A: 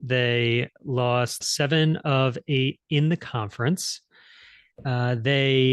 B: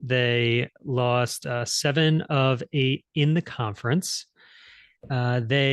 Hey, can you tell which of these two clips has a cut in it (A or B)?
A